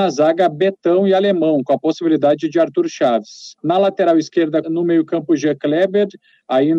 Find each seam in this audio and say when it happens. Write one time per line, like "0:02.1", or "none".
0:03.6
0:04.6